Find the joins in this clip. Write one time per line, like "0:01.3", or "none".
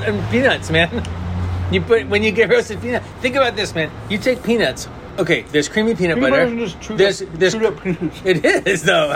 none